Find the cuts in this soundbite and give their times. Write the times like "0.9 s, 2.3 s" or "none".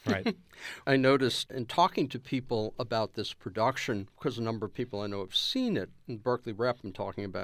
none